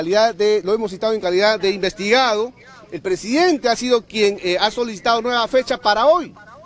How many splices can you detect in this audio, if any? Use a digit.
0